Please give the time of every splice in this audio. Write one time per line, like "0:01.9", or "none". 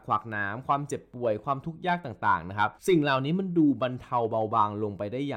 0:02.8